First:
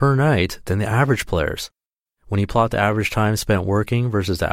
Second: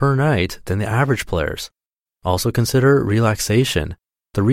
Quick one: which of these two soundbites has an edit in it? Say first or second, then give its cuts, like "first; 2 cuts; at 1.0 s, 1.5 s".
first; 1 cut; at 2.2 s